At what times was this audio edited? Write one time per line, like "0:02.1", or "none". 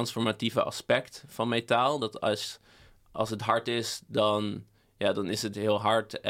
none